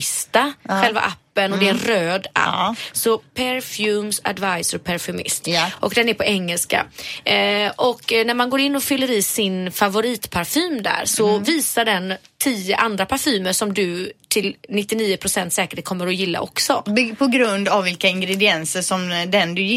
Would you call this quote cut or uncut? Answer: uncut